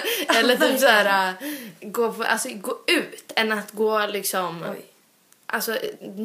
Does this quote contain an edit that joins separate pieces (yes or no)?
no